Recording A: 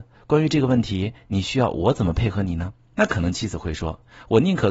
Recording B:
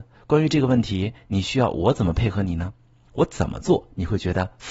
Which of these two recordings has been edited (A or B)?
A